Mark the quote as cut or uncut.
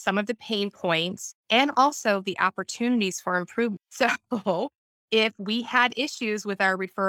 uncut